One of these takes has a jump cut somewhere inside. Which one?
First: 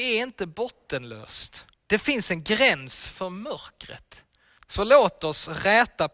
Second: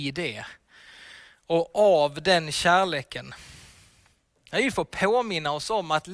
first; 2 cuts; at 1.8 s, 4.6 s

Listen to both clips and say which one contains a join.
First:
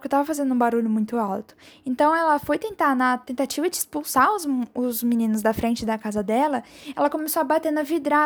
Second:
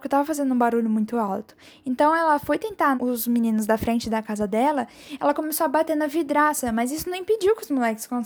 second; 1 cut; at 3.0 s

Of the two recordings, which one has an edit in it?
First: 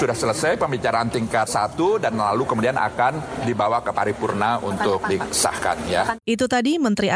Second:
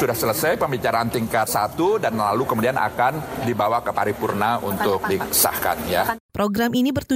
second; 1 cut; at 6.2 s

